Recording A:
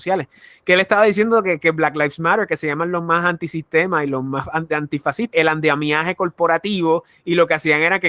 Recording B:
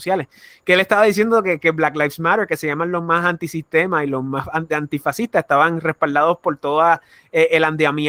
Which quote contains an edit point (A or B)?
A